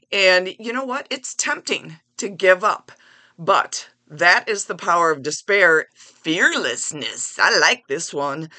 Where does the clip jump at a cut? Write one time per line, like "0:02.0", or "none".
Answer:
0:05.9